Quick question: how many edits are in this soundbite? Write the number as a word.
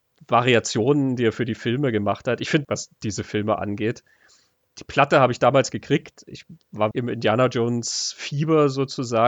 two